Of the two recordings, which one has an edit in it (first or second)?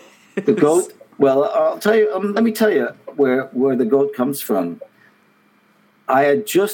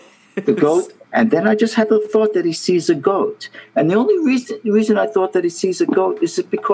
second